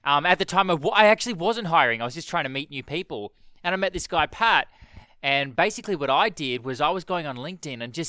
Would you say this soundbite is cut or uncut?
cut